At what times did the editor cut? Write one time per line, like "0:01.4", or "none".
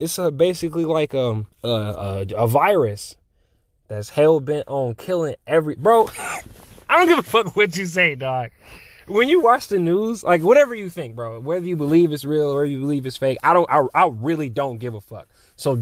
0:01.5